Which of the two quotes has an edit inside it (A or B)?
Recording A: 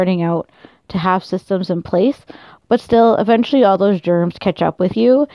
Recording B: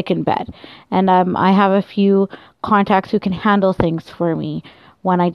A